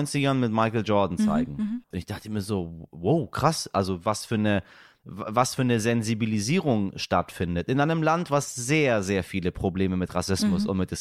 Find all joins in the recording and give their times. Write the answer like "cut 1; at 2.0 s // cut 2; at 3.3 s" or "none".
cut 1; at 1.9 s